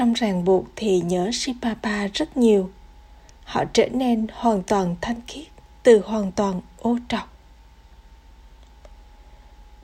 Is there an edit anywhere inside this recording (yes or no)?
yes